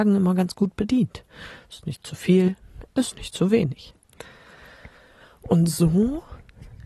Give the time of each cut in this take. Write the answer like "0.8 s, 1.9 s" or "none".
none